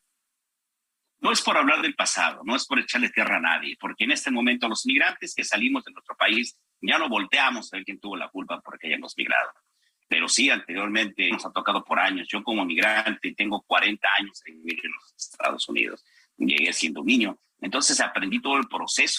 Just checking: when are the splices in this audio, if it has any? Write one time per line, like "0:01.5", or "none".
0:11.3

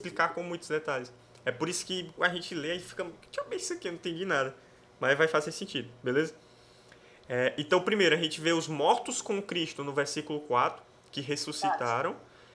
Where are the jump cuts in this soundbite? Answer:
0:02.2

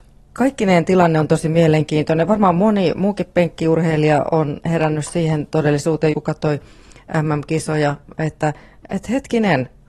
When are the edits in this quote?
0:06.1

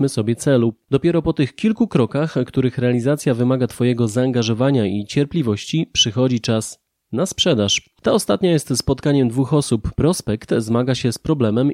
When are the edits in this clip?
0:09.9

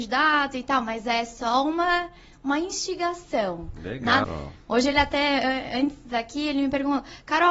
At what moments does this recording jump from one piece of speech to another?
0:04.2

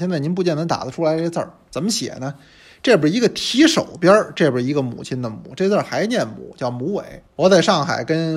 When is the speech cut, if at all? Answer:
0:07.2

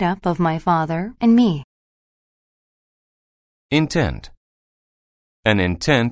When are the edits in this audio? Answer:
0:01.2

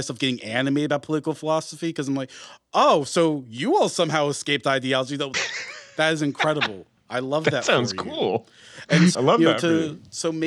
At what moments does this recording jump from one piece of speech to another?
0:05.3
0:09.1

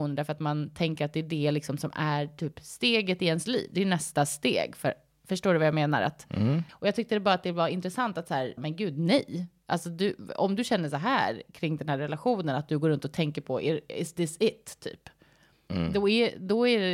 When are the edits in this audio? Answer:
0:06.7
0:08.6

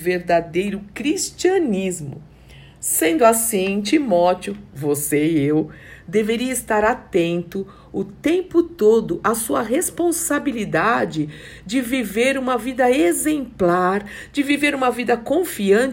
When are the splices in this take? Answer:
none

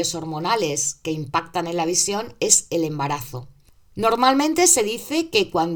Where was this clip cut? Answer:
none

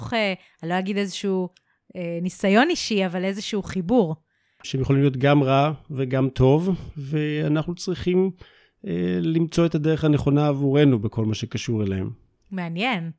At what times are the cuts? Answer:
0:04.6

